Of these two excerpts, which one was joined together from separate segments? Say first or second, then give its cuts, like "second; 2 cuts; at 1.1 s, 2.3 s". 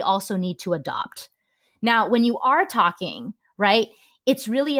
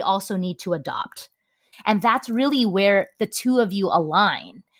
second; 1 cut; at 1.7 s